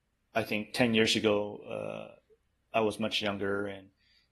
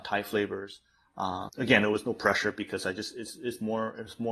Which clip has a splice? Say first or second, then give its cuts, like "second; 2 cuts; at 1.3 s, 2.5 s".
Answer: second; 1 cut; at 1.5 s